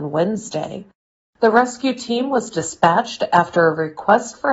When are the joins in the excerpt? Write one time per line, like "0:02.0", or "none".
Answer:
none